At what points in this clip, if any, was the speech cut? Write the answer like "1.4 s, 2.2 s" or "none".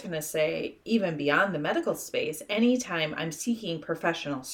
none